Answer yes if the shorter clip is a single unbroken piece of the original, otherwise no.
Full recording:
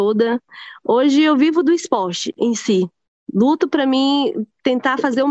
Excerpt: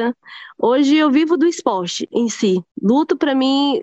no